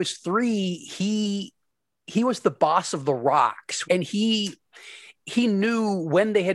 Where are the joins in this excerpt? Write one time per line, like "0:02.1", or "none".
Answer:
0:03.8